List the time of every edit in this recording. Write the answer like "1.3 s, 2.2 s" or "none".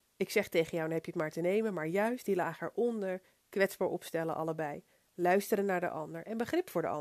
3.4 s